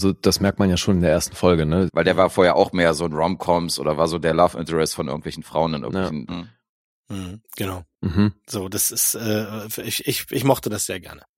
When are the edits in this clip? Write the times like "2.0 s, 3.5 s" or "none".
1.9 s, 6.3 s, 7.9 s